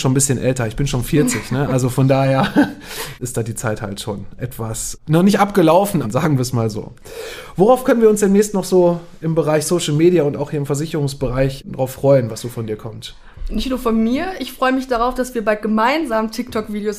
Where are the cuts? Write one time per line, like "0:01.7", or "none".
0:06.0